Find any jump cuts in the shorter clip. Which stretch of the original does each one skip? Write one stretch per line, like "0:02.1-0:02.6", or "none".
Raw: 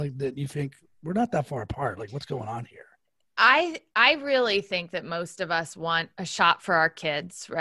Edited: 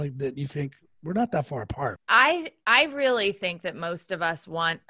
0:02.0-0:03.3